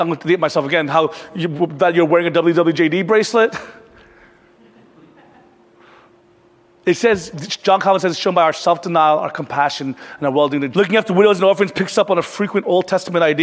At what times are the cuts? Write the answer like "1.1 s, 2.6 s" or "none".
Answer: 7.3 s, 10.7 s